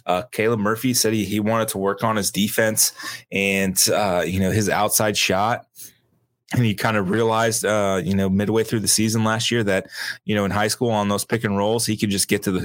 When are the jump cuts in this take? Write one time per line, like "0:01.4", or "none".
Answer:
none